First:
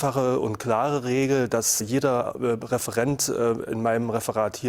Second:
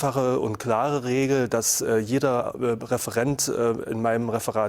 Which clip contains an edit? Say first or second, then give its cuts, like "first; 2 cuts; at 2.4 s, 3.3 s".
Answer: first; 1 cut; at 1.8 s